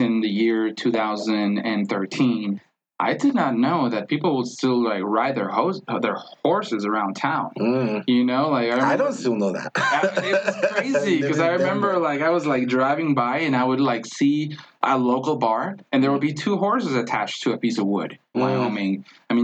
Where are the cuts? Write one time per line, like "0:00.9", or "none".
0:18.3